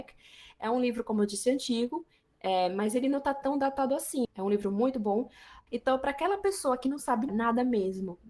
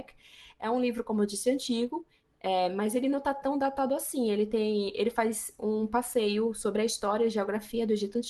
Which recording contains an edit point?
first; 3 cuts; at 4.2 s, 5.7 s, 7.3 s

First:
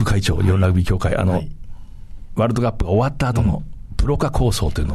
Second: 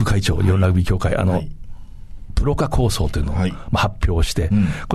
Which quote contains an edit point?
second; 1 cut; at 2.3 s

